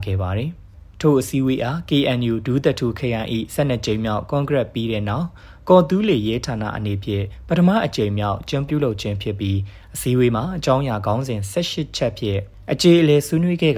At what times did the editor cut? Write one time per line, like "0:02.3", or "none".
0:08.7